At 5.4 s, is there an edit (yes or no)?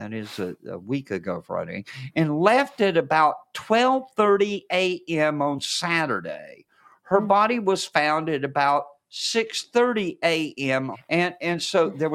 no